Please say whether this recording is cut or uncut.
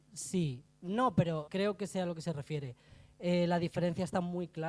cut